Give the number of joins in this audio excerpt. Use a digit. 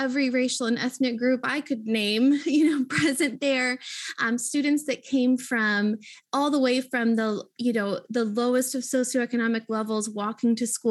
0